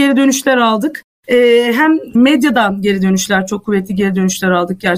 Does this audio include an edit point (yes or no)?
no